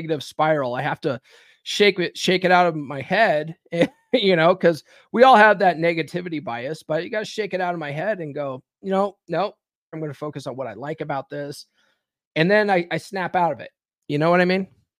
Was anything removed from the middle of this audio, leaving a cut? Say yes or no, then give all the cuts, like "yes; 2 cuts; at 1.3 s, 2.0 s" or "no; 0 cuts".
yes; 1 cut; at 9.9 s